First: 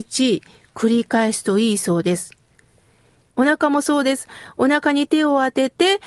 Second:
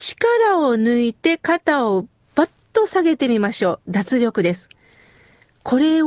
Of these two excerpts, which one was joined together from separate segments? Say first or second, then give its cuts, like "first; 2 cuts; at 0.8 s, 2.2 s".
first; 1 cut; at 3.3 s